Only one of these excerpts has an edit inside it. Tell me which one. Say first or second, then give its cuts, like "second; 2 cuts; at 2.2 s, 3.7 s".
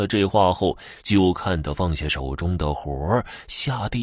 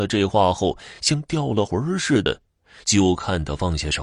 first; 1 cut; at 1.0 s